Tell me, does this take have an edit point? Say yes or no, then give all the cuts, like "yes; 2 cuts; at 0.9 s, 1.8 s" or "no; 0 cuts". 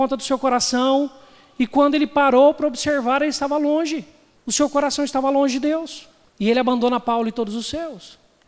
no; 0 cuts